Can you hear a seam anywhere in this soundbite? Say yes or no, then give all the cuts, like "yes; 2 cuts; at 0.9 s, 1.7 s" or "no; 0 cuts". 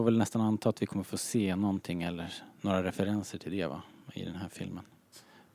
no; 0 cuts